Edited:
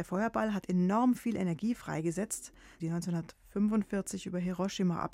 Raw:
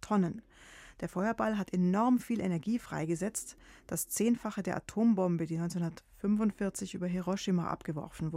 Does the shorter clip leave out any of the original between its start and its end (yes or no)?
yes